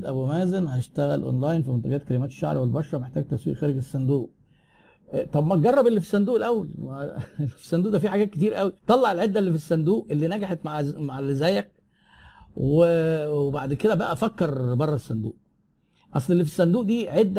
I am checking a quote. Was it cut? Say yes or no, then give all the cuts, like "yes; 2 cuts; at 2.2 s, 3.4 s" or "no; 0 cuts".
yes; 1 cut; at 8.8 s